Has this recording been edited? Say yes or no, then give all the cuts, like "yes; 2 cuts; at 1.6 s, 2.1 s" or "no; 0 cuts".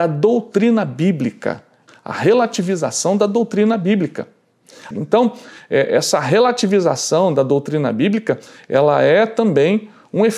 yes; 2 cuts; at 1.9 s, 4.9 s